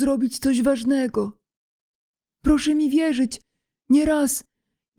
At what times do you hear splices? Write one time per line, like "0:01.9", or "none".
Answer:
0:02.2